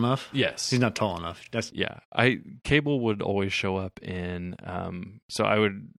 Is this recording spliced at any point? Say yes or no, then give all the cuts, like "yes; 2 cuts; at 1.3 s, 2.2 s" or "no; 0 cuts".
no; 0 cuts